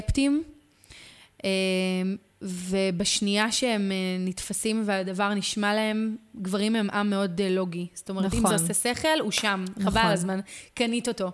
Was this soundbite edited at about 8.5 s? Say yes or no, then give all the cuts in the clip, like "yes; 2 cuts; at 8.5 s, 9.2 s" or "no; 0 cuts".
no; 0 cuts